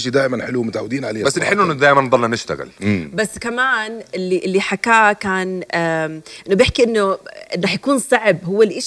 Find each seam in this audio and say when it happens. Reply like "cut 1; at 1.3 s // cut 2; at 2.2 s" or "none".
none